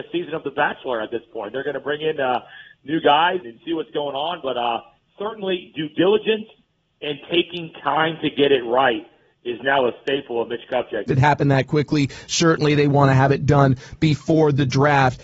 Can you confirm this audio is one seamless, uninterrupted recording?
no; 2 cuts; at 3.4 s, 11.1 s

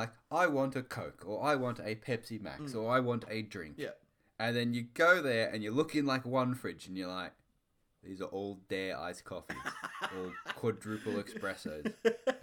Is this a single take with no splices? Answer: yes; 0 cuts

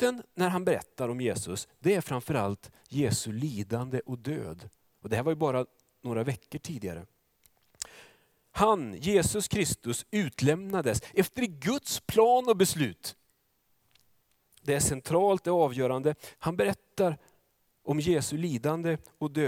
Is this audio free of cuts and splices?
no; 2 cuts; at 14.6 s, 16.3 s

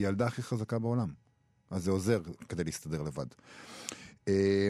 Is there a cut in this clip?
no; 0 cuts

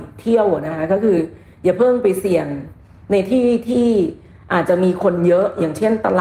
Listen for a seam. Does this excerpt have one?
no; 0 cuts

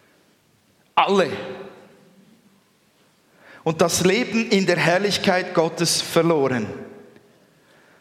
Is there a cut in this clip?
no; 0 cuts

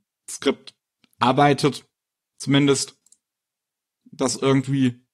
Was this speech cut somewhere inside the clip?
no; 0 cuts

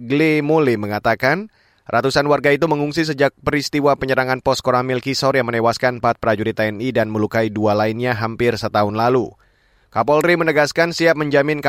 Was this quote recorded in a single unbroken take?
yes; 0 cuts

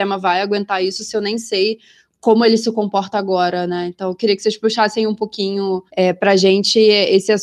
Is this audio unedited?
no; 1 cut; at 5.9 s

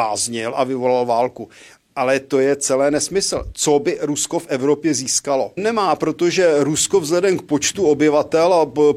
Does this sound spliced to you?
yes; 1 cut; at 5.6 s

